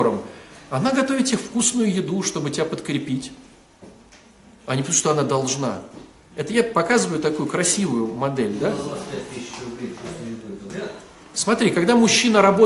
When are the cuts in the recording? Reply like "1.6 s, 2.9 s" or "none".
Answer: none